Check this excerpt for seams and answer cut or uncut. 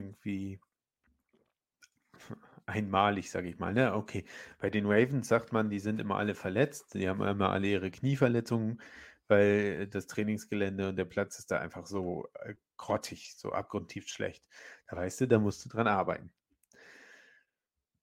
uncut